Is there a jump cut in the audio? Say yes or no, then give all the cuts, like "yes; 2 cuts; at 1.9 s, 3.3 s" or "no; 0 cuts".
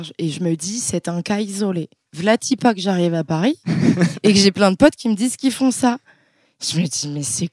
no; 0 cuts